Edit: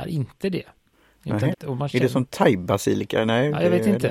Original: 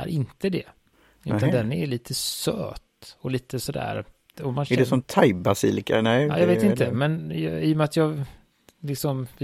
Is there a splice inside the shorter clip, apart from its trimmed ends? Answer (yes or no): yes